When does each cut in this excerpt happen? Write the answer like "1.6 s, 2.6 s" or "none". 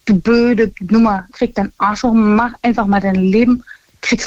1.3 s